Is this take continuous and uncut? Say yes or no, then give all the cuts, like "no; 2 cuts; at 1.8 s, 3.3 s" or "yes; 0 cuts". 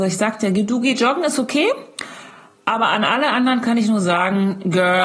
yes; 0 cuts